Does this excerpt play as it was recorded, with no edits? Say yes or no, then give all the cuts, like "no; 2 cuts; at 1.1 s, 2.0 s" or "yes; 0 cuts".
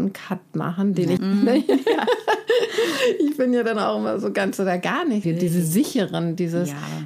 no; 2 cuts; at 1.2 s, 5.2 s